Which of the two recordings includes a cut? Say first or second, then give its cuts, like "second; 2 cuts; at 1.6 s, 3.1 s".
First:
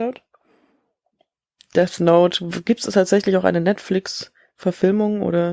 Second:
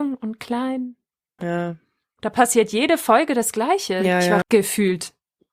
second; 2 cuts; at 1.4 s, 4.4 s